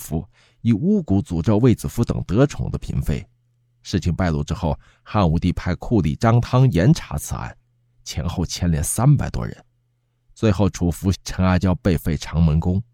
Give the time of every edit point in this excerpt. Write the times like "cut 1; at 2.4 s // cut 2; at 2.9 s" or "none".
cut 1; at 11.1 s